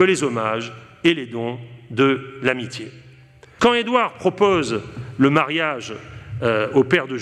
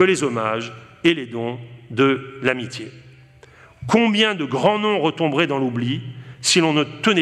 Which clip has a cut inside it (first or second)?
first